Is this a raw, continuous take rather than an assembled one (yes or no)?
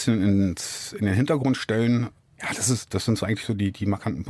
yes